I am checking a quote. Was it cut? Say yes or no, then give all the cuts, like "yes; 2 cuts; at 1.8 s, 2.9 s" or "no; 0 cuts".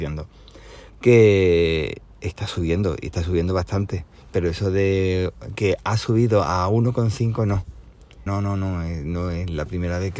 yes; 2 cuts; at 0.9 s, 8.3 s